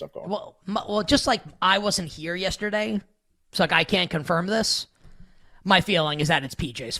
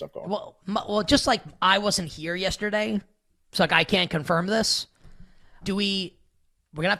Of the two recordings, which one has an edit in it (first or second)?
second